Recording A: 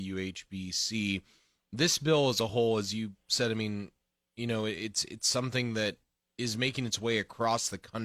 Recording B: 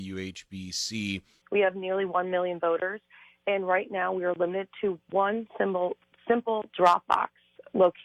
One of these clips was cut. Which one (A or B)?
B